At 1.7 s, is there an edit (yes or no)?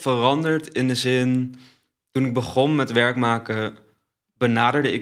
no